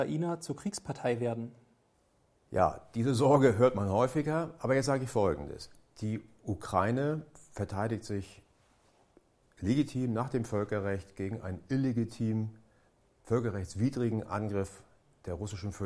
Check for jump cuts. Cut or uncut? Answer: uncut